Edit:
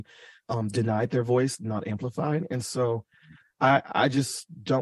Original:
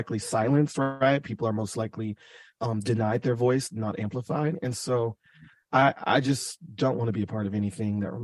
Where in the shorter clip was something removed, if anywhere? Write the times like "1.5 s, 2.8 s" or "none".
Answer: none